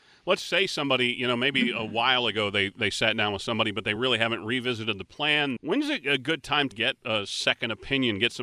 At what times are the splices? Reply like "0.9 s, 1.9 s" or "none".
5.6 s, 6.7 s